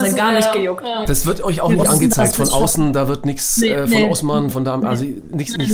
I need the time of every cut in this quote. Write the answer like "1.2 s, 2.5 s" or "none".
4.5 s

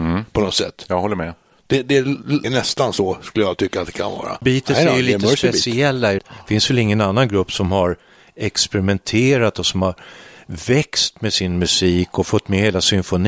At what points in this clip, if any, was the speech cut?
2.4 s, 4.4 s, 6.2 s

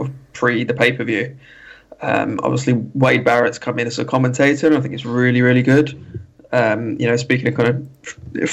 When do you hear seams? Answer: none

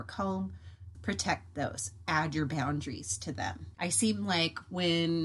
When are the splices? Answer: 0.9 s, 3.8 s

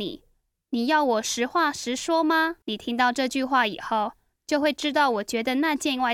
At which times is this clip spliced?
2.6 s

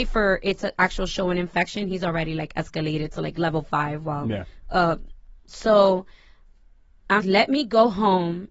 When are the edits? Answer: 5.5 s, 7.2 s

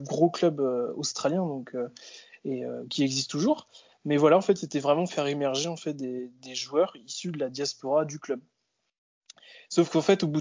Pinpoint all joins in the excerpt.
none

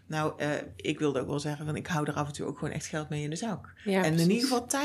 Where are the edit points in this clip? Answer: none

